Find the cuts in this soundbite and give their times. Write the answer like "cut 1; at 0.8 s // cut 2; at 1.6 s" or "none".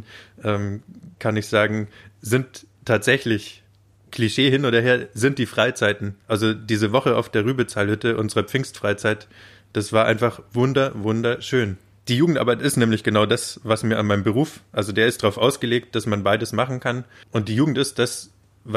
cut 1; at 6.2 s // cut 2; at 12.0 s